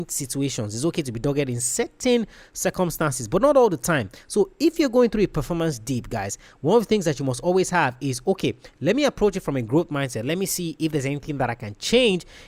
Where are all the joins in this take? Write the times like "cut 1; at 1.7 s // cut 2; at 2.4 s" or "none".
none